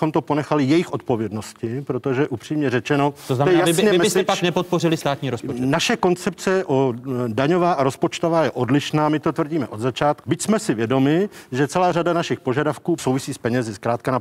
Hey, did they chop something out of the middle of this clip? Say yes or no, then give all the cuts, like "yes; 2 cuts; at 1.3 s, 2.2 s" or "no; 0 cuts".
yes; 2 cuts; at 10.2 s, 13.0 s